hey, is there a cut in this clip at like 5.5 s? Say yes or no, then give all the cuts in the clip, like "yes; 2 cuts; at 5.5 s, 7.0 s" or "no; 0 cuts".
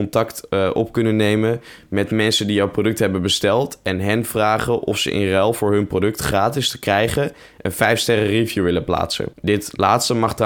no; 1 cut; at 9.3 s